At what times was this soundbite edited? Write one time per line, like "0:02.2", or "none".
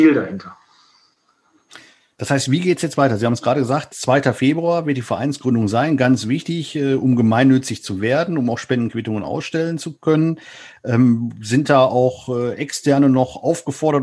none